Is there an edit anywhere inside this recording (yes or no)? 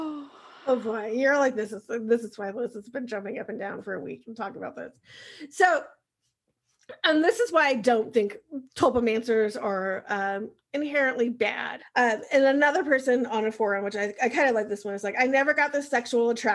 yes